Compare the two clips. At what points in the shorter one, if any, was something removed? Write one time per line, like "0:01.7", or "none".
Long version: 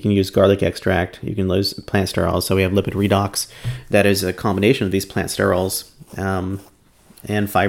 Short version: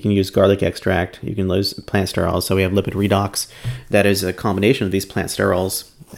none